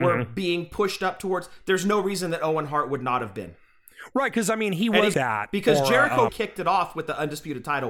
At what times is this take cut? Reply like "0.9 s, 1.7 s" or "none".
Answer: 5.1 s, 6.3 s